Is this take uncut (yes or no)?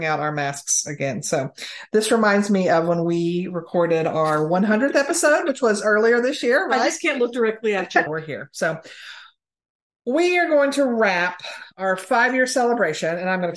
no